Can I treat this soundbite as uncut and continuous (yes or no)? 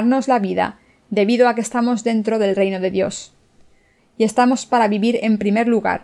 no